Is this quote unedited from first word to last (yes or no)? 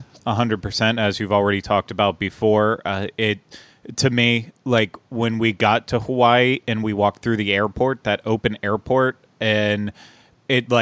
yes